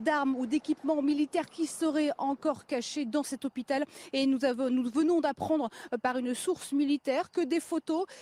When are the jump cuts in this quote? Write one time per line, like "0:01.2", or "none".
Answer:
none